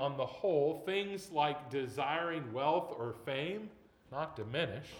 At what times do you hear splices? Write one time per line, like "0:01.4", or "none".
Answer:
0:04.0